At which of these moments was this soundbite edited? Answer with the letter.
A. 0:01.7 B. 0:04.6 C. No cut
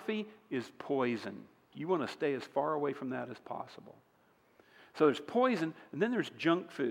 A